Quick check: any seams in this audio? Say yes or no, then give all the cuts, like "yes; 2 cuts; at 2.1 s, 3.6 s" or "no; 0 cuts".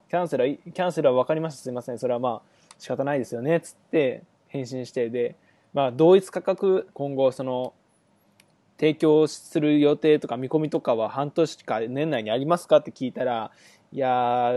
yes; 1 cut; at 6.9 s